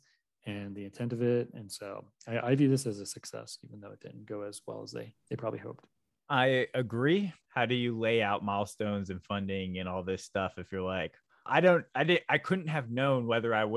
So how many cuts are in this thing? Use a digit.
0